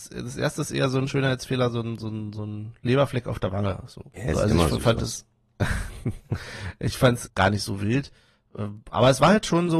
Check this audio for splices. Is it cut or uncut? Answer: cut